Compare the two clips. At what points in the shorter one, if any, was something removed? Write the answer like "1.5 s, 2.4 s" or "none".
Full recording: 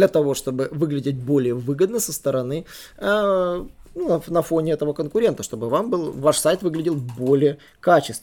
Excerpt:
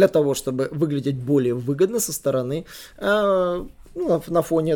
none